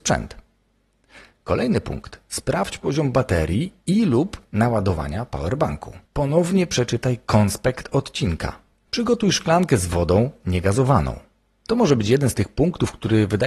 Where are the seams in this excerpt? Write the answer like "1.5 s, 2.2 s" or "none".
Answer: 6.0 s, 8.9 s, 11.6 s